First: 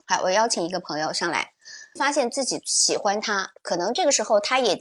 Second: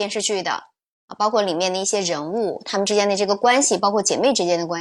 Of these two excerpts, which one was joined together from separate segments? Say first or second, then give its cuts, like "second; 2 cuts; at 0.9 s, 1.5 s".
first; 1 cut; at 2.0 s